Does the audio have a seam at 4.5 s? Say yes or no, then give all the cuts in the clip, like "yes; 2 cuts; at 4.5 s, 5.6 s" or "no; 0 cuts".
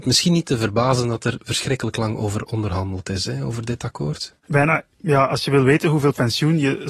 yes; 1 cut; at 4.5 s